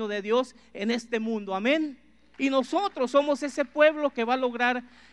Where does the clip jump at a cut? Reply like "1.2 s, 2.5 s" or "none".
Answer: 2.3 s